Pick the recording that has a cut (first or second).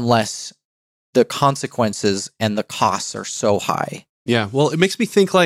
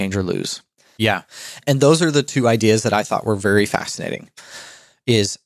second